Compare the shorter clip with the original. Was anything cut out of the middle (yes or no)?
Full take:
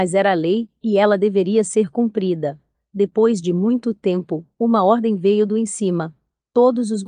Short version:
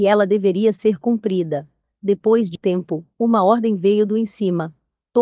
yes